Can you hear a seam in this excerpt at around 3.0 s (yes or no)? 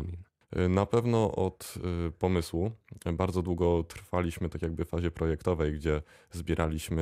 no